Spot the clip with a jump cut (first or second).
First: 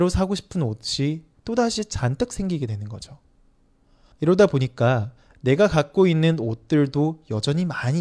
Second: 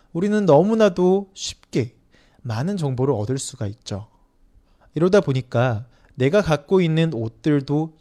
first